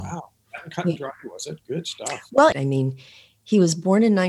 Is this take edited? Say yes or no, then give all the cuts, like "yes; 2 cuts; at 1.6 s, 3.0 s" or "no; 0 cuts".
yes; 1 cut; at 2.5 s